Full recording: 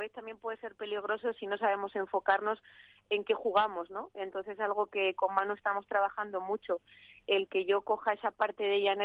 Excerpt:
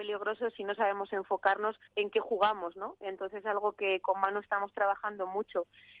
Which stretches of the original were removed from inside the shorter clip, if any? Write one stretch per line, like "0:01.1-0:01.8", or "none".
0:02.7-0:03.0